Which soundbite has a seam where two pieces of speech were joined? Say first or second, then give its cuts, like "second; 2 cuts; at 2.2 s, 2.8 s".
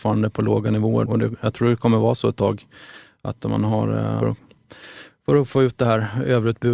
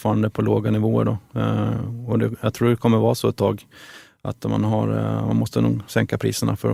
first; 2 cuts; at 1.1 s, 4.2 s